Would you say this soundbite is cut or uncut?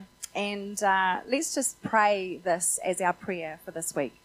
uncut